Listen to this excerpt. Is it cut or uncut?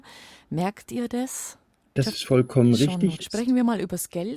cut